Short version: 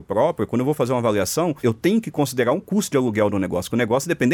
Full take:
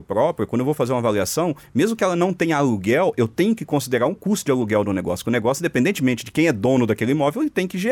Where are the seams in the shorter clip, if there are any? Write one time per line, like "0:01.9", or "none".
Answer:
0:01.6